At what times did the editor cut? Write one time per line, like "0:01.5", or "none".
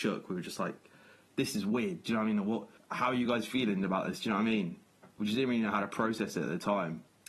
none